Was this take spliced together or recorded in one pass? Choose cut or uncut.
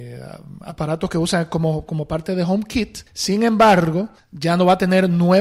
cut